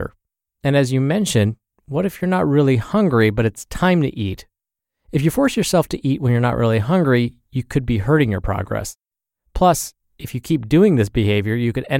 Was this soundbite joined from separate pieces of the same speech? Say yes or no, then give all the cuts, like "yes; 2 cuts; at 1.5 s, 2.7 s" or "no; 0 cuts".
no; 0 cuts